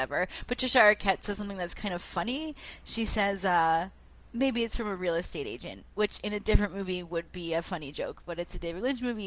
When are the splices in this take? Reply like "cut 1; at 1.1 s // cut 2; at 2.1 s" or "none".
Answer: none